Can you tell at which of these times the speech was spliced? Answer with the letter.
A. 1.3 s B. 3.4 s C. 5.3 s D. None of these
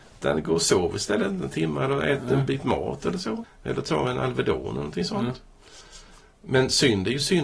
B